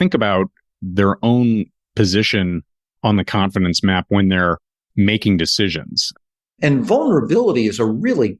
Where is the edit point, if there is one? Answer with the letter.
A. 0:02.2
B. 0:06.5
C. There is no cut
B